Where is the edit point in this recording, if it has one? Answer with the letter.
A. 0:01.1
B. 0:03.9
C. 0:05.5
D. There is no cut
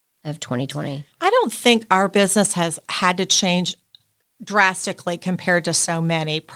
A